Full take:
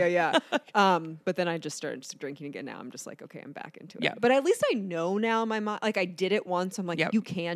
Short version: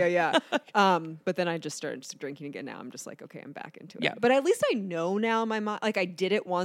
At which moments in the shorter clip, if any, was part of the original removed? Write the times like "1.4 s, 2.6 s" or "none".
none

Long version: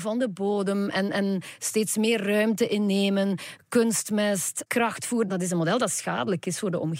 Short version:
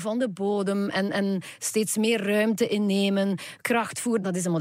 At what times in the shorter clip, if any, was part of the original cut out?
3.6 s

